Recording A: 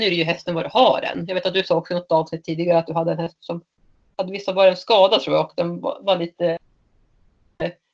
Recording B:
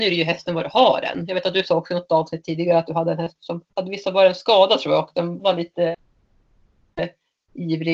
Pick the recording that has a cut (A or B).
B